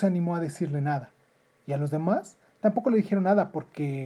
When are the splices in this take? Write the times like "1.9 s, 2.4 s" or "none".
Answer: none